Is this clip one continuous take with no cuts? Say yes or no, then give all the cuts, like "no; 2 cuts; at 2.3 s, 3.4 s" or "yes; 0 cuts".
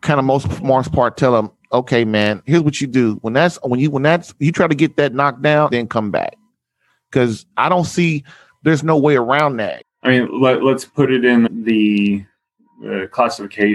no; 3 cuts; at 5.7 s, 9.8 s, 11.5 s